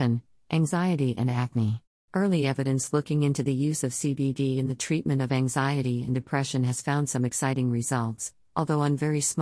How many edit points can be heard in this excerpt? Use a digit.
1